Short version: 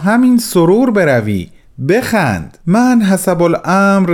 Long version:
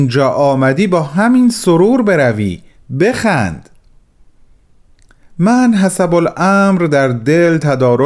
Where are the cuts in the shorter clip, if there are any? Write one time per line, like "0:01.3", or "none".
0:02.6